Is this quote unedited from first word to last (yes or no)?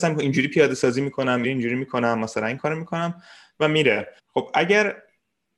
no